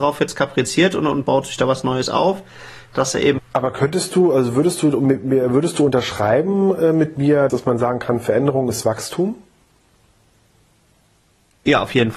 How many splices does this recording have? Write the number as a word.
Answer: two